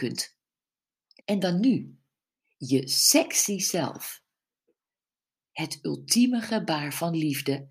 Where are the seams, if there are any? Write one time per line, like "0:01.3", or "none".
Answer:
0:01.2
0:05.5